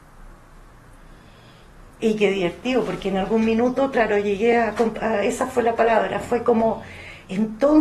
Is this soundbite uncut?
yes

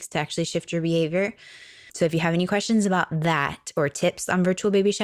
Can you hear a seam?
yes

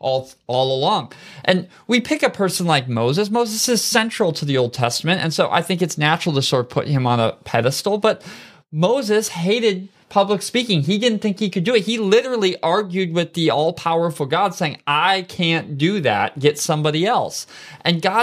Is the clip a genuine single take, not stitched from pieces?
yes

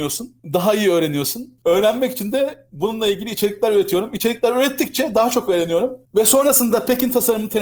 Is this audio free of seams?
no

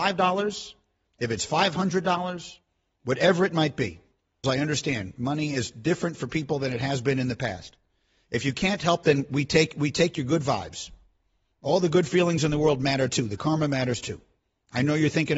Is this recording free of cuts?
no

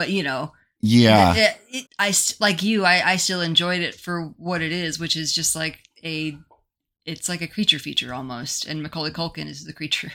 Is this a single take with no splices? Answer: no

